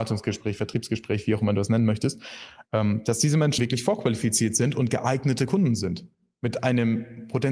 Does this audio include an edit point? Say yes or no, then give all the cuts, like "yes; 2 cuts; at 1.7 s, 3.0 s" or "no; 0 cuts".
yes; 1 cut; at 3.6 s